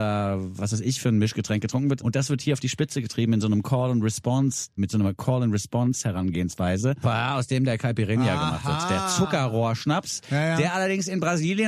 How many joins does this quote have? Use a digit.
3